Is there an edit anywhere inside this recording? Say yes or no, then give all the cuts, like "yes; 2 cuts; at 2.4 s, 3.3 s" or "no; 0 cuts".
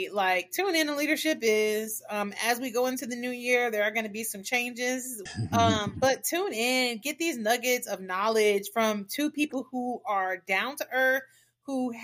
yes; 1 cut; at 5.3 s